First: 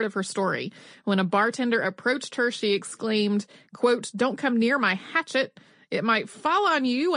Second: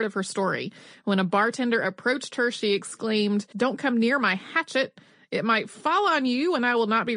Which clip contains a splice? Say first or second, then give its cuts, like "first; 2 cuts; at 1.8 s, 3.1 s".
second; 1 cut; at 3.5 s